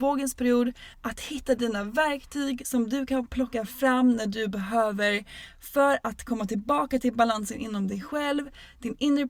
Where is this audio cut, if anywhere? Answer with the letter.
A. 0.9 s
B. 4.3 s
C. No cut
A